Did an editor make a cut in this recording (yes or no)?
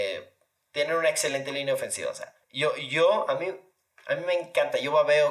yes